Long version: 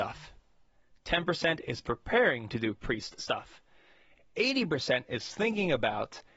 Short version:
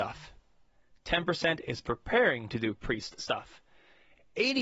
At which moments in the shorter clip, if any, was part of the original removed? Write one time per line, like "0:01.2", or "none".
none